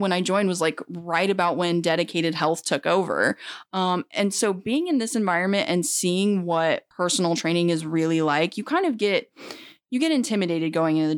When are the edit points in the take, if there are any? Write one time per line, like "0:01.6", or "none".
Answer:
0:06.9